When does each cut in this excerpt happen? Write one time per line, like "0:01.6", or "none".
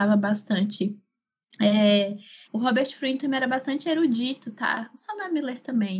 0:02.4